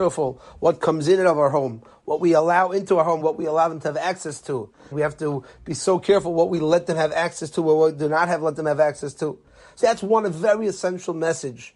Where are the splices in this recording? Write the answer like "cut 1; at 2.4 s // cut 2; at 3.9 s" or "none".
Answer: cut 1; at 3.2 s // cut 2; at 4.9 s // cut 3; at 9.8 s